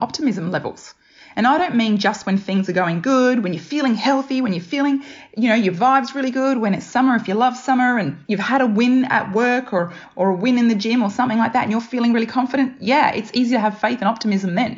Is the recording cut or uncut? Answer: cut